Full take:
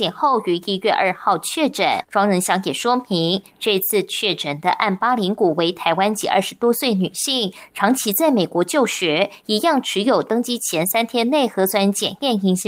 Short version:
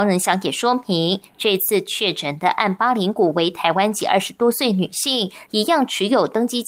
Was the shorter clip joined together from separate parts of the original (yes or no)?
yes